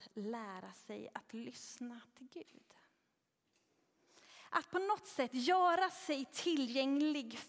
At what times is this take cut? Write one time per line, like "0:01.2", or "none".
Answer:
none